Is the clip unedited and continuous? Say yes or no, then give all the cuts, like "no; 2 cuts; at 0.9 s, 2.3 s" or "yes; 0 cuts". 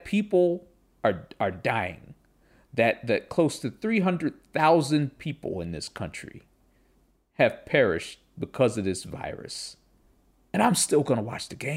yes; 0 cuts